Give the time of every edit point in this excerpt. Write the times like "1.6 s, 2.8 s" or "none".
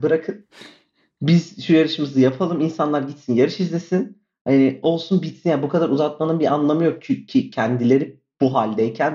none

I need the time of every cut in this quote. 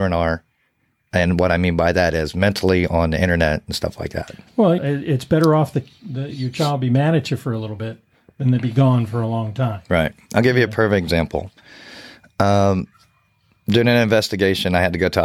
4.8 s

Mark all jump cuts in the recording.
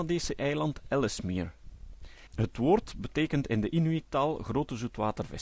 2.3 s

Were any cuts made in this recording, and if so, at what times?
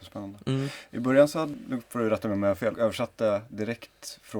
2.7 s

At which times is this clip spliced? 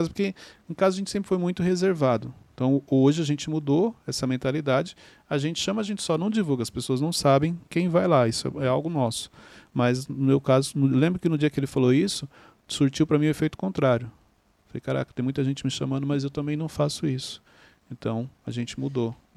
none

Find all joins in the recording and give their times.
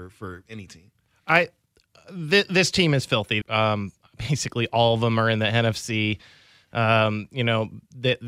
3.4 s

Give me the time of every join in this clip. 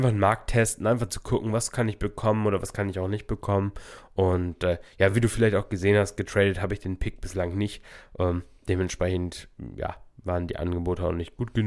none

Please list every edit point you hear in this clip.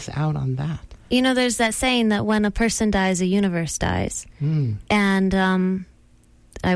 1.0 s

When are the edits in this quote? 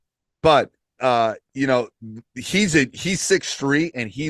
1.0 s

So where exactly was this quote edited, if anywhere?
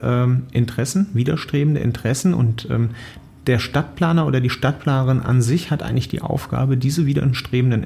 none

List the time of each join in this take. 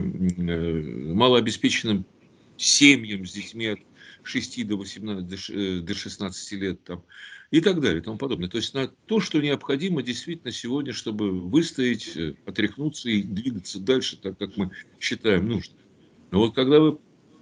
none

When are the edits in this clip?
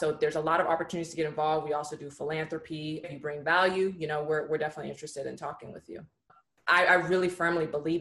3.0 s, 6.3 s

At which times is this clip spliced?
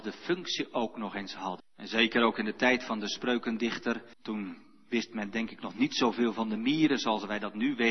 1.6 s, 4.1 s

